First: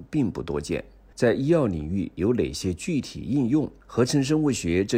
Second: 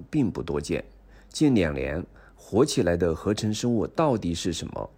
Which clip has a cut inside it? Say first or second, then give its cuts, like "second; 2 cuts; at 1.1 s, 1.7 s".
first; 2 cuts; at 1.1 s, 3.8 s